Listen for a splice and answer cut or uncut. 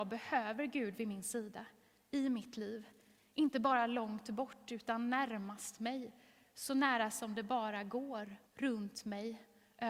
cut